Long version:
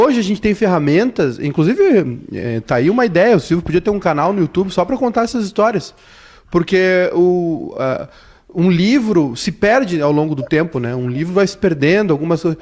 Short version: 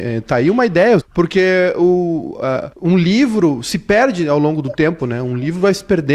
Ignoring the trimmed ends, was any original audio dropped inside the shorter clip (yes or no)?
yes